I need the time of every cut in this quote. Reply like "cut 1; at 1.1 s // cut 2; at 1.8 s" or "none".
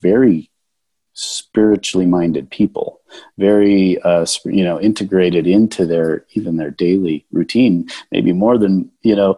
none